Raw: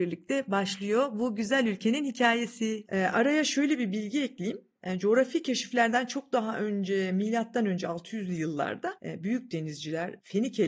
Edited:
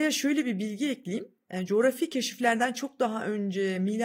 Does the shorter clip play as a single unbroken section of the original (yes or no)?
yes